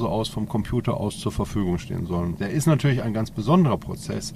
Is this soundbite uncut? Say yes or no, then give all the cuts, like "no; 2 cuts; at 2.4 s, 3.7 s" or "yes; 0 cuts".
no; 1 cut; at 2.4 s